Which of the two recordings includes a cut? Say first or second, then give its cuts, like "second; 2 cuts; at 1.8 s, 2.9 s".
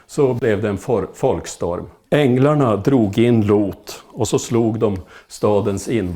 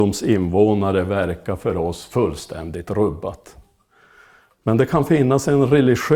first; 1 cut; at 2.1 s